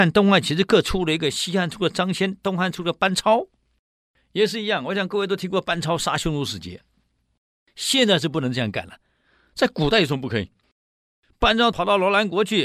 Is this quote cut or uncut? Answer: uncut